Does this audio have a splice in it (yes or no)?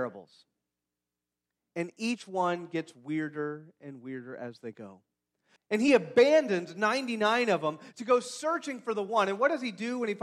yes